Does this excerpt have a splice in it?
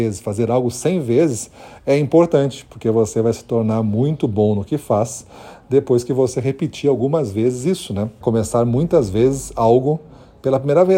yes; 1 cut; at 8.2 s

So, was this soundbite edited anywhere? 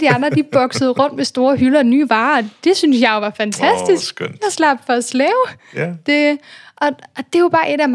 no; 0 cuts

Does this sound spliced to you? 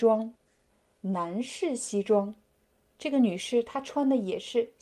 yes; 1 cut; at 2.9 s

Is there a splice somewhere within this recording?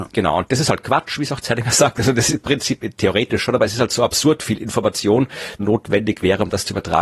yes; 1 cut; at 5.6 s

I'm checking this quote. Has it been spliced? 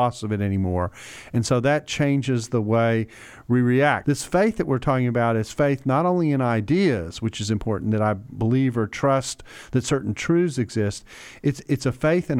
yes; 1 cut; at 4.0 s

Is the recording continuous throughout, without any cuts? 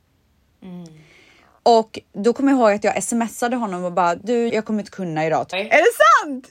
no; 2 cuts; at 4.5 s, 5.5 s

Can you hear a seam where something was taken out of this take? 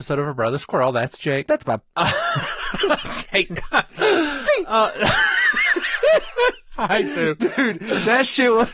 yes; 1 cut; at 1.9 s

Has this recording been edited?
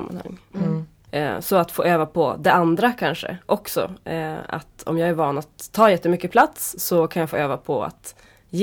yes; 1 cut; at 1.1 s

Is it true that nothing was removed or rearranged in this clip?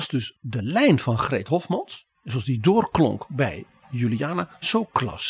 no; 1 cut; at 2.1 s

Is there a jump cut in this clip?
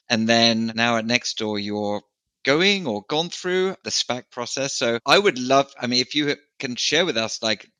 no; 0 cuts

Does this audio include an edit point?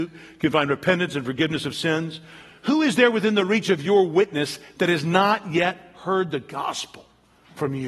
no; 0 cuts

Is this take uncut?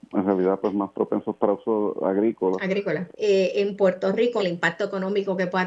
no; 2 cuts; at 3.1 s, 4.4 s

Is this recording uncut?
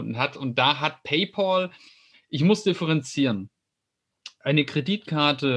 yes; 0 cuts

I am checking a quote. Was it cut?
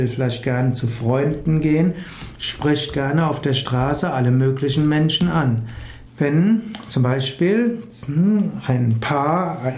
yes; 1 cut; at 6.1 s

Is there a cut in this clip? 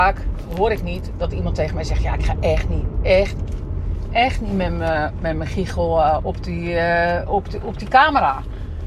no; 0 cuts

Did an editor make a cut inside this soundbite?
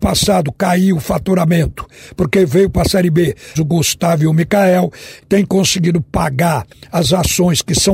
yes; 2 cuts; at 3.5 s, 5.2 s

